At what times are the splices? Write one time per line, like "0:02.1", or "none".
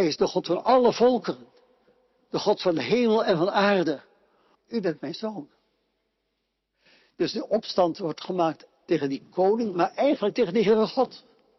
0:04.5